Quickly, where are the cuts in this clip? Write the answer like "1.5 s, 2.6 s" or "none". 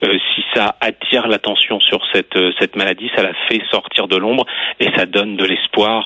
none